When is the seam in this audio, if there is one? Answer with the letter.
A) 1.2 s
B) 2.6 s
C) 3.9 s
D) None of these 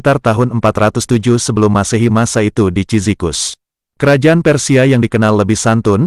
C